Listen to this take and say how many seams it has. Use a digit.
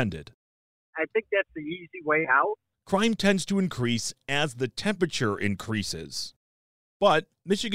1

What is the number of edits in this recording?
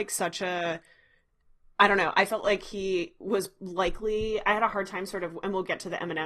0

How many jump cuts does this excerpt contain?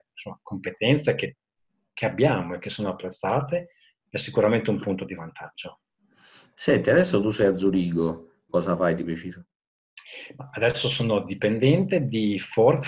1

